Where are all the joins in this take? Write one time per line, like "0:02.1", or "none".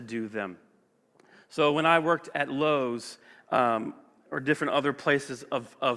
0:02.3